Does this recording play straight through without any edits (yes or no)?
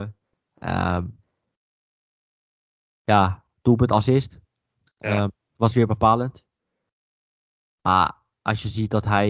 yes